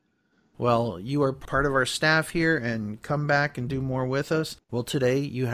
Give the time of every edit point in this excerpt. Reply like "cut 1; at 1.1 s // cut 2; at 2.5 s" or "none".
cut 1; at 4.6 s